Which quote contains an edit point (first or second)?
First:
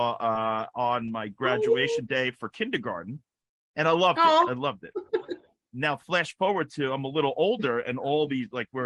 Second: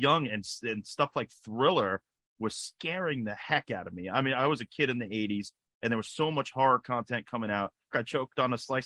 second